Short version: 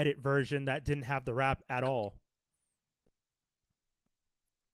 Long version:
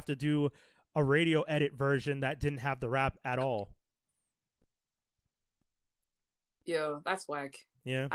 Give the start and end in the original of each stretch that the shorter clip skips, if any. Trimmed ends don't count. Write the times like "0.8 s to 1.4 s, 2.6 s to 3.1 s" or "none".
none